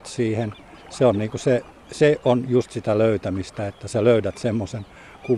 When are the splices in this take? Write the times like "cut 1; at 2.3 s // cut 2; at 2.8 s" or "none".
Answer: none